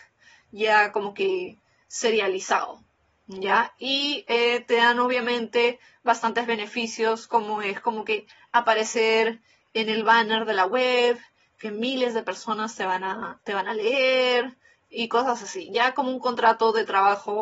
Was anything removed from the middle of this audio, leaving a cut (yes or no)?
no